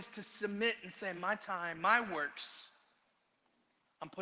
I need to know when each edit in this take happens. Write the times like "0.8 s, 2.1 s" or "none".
1.2 s